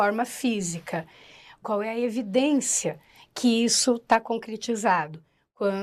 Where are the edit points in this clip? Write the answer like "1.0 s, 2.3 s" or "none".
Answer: 1.6 s